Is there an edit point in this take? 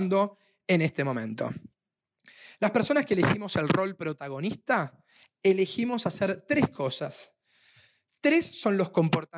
no; 0 cuts

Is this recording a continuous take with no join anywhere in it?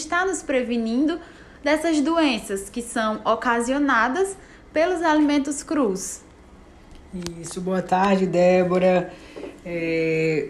yes; 0 cuts

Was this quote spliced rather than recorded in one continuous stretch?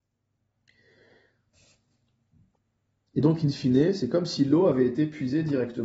no; 0 cuts

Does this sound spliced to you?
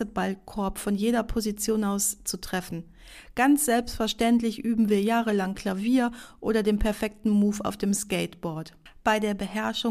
no; 0 cuts

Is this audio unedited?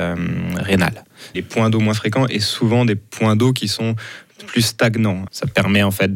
no; 2 cuts; at 1.3 s, 5.3 s

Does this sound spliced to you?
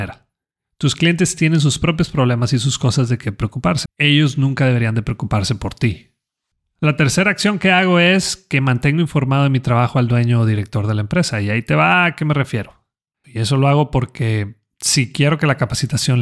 yes; 2 cuts; at 3.8 s, 13.2 s

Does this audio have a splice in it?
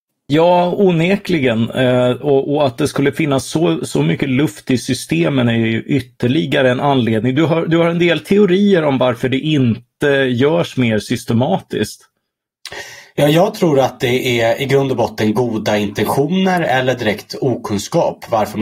no; 0 cuts

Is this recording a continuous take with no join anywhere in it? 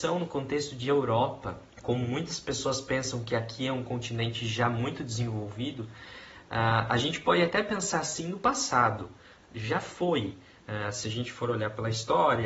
no; 1 cut; at 1.7 s

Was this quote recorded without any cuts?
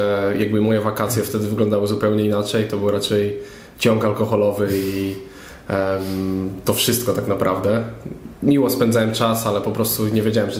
yes; 0 cuts

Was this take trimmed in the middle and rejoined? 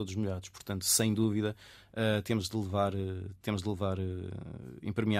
no; 0 cuts

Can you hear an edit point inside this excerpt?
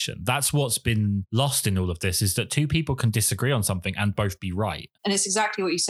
yes; 1 cut; at 5.0 s

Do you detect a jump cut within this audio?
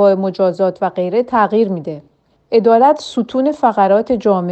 no; 0 cuts

